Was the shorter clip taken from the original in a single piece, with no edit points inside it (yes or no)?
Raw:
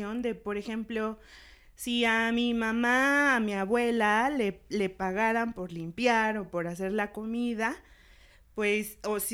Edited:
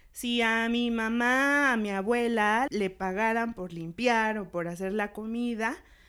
no